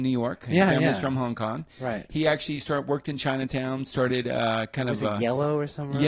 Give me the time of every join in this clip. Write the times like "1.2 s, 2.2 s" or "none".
none